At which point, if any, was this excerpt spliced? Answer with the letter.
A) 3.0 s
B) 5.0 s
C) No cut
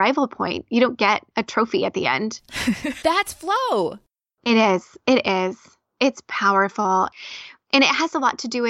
A